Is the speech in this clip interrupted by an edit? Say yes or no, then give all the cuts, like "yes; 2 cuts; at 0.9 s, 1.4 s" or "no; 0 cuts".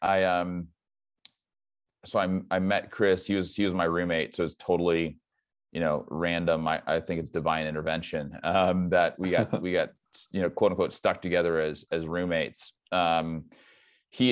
no; 0 cuts